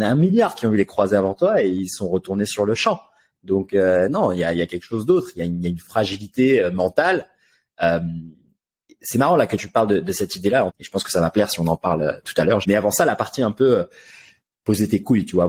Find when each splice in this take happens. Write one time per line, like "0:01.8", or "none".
0:10.7
0:12.6